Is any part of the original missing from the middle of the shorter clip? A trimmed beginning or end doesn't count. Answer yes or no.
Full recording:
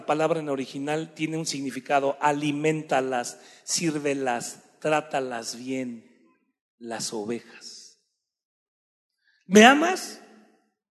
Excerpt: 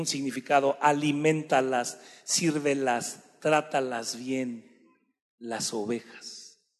no